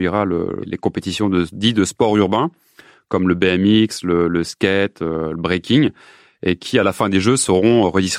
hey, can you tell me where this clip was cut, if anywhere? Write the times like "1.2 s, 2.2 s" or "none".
none